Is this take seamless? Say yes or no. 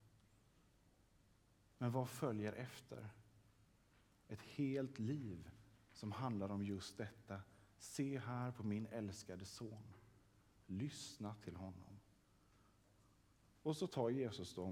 yes